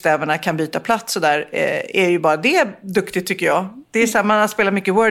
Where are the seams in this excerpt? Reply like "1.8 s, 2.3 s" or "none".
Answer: none